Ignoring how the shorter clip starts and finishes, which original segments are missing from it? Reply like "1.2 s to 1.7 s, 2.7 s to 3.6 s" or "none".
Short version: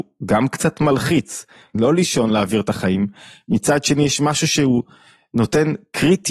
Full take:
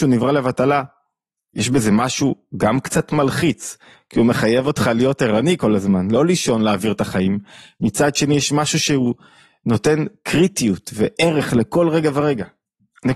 4.1 s to 6.1 s